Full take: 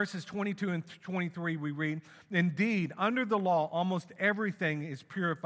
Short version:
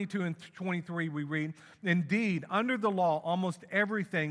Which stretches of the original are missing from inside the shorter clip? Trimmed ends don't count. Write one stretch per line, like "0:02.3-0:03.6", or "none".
none